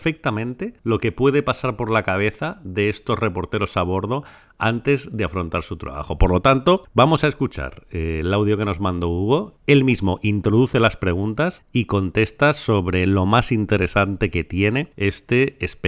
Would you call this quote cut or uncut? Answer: uncut